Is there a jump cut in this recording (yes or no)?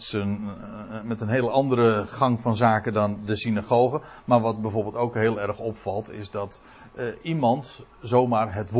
no